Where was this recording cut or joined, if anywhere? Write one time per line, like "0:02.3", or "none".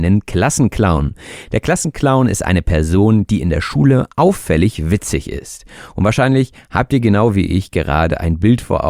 none